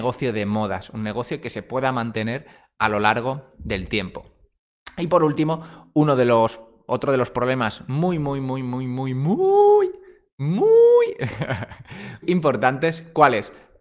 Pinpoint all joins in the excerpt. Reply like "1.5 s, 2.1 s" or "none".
12.2 s